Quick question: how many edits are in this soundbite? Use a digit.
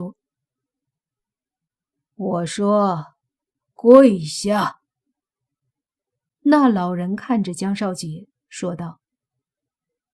0